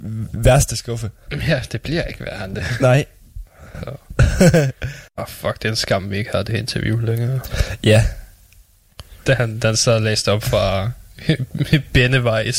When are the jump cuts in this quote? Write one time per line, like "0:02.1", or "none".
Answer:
0:05.1
0:09.3